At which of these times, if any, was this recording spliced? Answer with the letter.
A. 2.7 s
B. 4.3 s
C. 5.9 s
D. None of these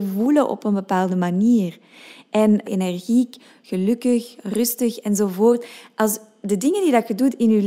A